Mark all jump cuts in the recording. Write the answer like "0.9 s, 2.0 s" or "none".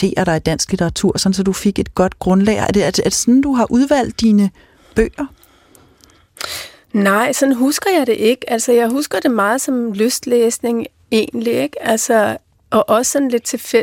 none